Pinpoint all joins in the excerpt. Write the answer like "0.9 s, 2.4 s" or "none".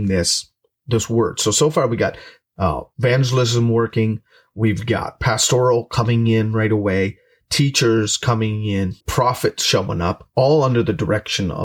9.0 s